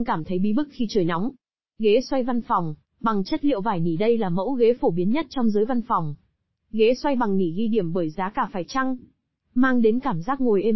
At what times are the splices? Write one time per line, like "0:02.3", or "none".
none